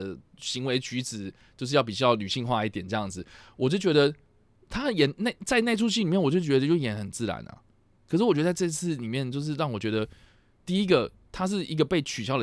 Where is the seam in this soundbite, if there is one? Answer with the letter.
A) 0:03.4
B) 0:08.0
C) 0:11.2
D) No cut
D